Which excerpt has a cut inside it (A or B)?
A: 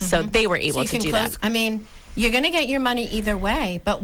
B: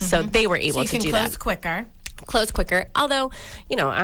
A